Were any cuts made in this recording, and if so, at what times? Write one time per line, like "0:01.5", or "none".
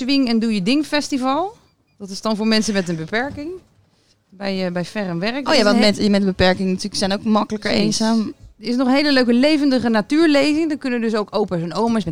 none